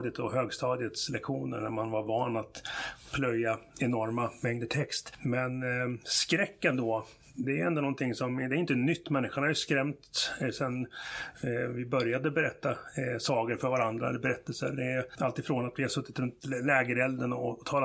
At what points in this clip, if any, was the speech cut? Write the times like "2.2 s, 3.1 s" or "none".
none

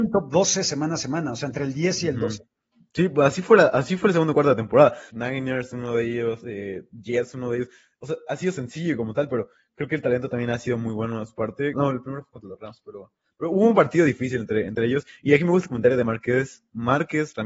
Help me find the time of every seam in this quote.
5.1 s, 11.7 s

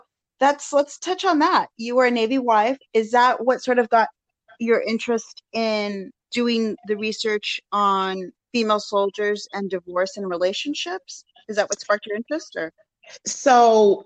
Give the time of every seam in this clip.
6.2 s

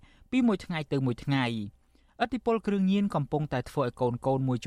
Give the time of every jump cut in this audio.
none

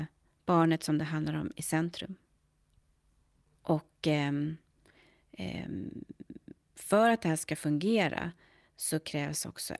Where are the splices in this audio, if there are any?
3.5 s

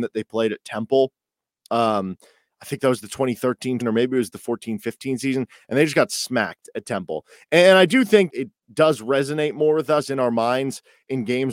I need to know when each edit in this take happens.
3.8 s, 8.3 s

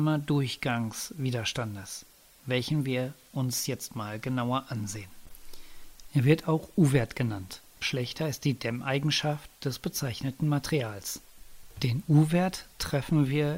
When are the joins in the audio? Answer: 6.1 s, 7.8 s, 11.7 s

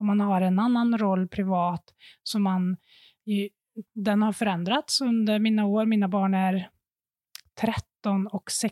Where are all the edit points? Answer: 3.9 s

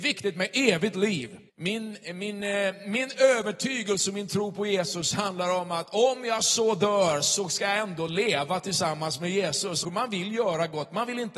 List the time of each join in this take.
1.5 s, 9.8 s

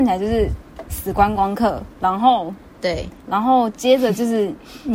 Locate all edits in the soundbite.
1.9 s, 3.2 s

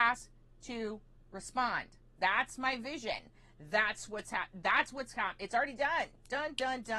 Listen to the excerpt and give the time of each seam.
2.2 s

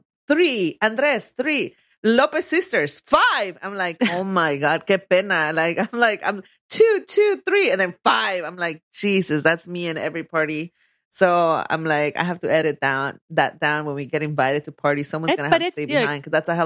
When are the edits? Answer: none

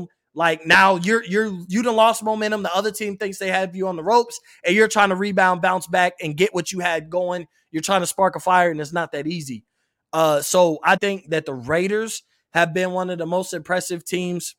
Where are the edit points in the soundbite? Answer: 11.0 s

